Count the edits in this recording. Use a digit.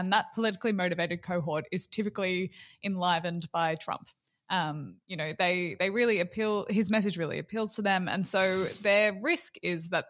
0